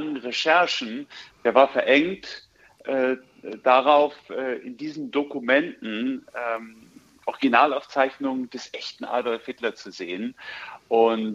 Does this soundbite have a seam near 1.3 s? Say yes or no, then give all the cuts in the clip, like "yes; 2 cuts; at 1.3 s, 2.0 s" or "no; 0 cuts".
yes; 1 cut; at 1.3 s